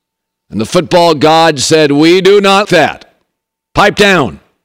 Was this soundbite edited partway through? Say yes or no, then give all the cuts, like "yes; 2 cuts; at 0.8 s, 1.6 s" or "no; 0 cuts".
yes; 1 cut; at 2.6 s